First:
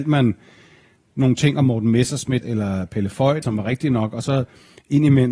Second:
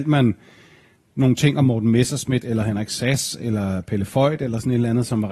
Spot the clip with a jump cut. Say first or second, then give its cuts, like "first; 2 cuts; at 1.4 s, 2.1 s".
first; 2 cuts; at 2.4 s, 3.4 s